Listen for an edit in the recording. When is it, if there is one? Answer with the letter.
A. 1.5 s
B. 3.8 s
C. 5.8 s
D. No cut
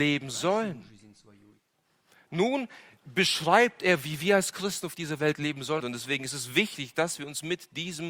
C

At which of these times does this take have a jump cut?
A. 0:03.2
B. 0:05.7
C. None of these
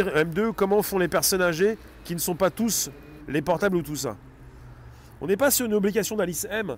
A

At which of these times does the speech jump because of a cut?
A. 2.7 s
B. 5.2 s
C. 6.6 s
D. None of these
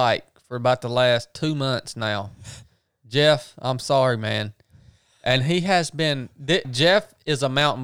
C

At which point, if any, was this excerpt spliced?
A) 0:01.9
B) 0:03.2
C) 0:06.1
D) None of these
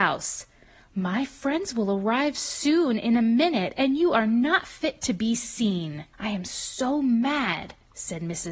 C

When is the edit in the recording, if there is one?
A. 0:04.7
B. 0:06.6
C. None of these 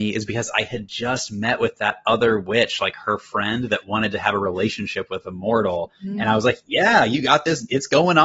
C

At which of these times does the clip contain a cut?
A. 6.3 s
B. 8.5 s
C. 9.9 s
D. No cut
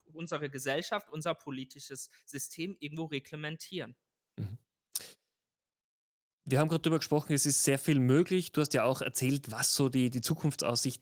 D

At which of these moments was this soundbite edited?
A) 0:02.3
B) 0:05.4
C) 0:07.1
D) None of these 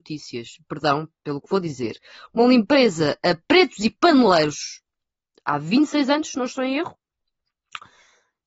D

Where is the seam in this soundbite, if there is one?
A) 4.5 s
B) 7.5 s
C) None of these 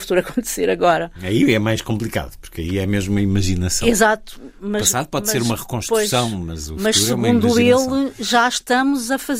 C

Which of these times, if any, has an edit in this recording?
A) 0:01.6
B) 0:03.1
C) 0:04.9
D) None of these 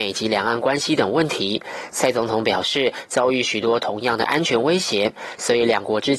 B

